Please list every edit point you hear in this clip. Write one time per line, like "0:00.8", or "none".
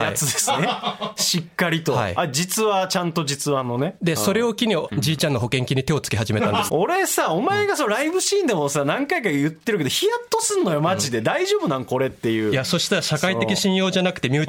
0:04.9
0:06.7